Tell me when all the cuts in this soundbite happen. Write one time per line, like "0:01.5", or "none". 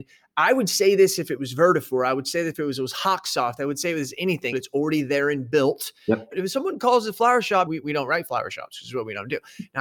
0:04.5
0:06.3
0:07.7